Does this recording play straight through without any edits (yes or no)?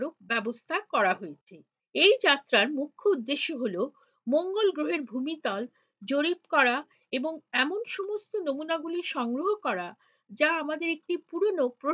yes